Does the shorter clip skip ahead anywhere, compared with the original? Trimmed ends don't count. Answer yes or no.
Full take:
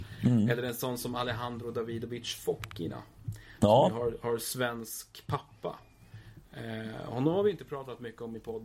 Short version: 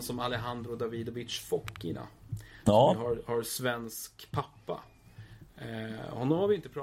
no